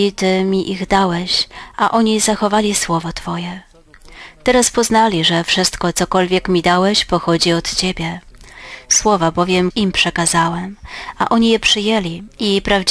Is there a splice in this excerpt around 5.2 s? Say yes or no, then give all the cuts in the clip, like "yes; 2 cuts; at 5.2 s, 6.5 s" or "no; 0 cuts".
no; 1 cut; at 9.7 s